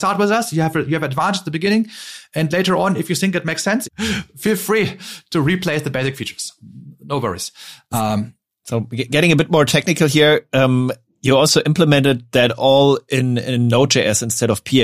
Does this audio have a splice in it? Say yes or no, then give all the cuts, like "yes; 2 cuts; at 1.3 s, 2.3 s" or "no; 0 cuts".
yes; 1 cut; at 3.8 s